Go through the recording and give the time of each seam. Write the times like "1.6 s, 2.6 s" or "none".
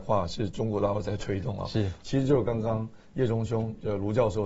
none